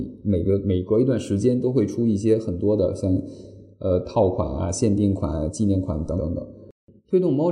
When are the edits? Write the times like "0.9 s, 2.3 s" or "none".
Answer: 6.2 s